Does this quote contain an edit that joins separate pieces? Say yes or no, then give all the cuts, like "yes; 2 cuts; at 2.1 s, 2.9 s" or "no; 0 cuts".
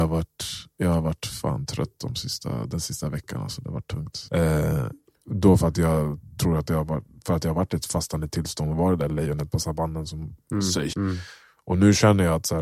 yes; 2 cuts; at 4.3 s, 10.9 s